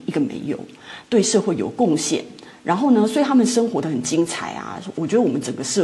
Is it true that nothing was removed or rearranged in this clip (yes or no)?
no